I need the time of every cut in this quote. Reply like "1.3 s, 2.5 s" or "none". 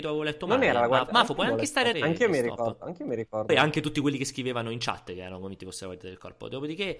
1.9 s, 3.5 s